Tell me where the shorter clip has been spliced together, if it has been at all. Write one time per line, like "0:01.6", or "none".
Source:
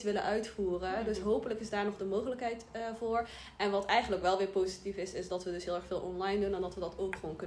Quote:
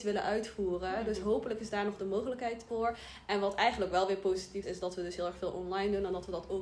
0:02.7
0:04.6